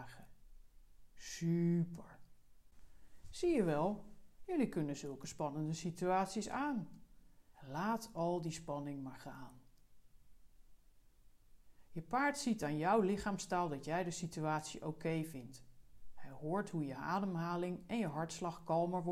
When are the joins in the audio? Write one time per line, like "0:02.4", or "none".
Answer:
0:07.5